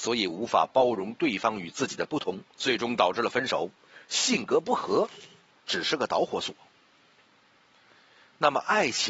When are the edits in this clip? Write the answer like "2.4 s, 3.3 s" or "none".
2.5 s